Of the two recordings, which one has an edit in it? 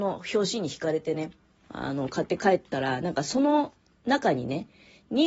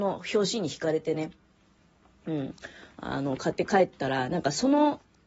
first; 1 cut; at 1.6 s

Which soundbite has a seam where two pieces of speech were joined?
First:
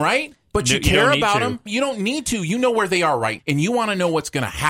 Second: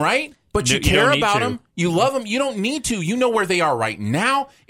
first; 2 cuts; at 1.7 s, 3.4 s

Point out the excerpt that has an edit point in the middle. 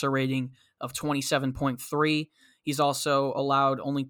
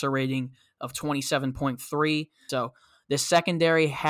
second; 1 cut; at 2.5 s

